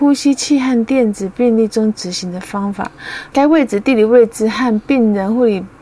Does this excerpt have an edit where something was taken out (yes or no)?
yes